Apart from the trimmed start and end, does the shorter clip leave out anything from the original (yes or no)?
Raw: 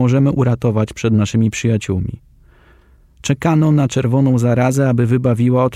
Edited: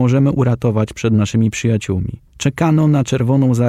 yes